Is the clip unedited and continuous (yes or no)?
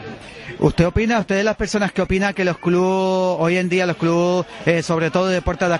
yes